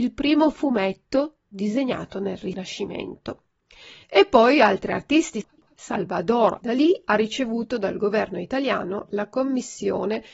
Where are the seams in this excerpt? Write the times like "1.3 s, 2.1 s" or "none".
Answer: 4.0 s